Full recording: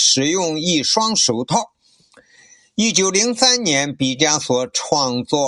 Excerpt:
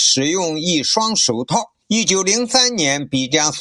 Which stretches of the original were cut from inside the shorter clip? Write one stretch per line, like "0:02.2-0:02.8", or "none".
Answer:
0:01.8-0:02.7